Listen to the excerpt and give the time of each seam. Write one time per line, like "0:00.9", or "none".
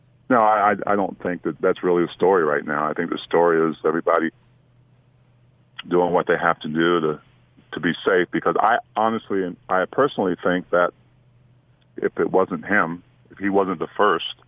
0:01.6